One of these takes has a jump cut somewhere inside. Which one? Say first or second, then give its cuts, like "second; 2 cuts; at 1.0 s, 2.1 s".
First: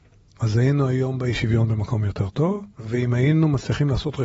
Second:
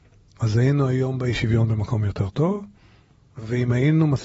first; 1 cut; at 2.7 s